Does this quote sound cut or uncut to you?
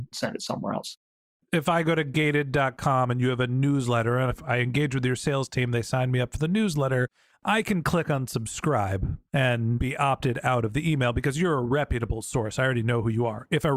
uncut